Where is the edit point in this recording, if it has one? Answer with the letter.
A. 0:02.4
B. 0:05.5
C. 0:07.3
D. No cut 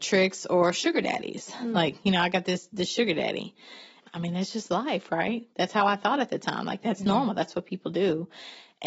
D